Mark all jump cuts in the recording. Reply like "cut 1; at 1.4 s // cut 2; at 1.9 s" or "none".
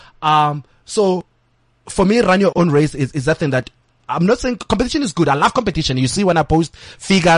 none